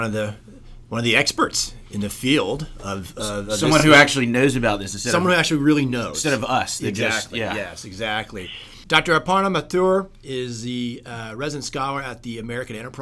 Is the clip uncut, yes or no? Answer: yes